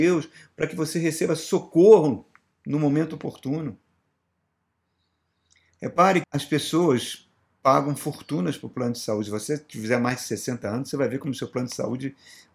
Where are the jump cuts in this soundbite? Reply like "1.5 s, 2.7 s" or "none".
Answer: 6.2 s